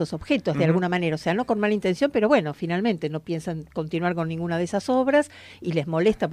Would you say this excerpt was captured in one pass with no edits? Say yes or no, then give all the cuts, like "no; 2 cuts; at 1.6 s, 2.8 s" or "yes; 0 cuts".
yes; 0 cuts